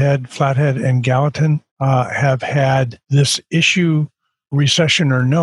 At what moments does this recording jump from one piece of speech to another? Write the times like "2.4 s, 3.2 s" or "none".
1.7 s, 3.0 s